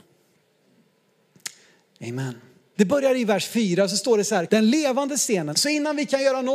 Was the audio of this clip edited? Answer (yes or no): yes